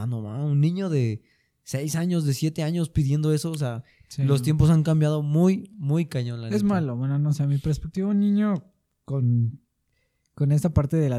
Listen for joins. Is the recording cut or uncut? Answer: uncut